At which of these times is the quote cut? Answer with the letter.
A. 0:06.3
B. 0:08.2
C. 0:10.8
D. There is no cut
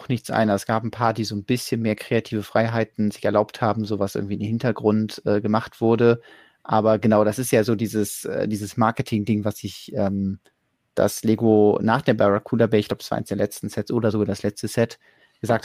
C